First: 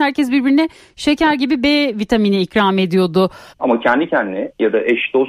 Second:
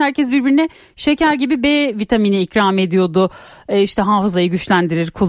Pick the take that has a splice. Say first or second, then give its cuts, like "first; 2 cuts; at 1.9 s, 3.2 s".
first; 1 cut; at 3.5 s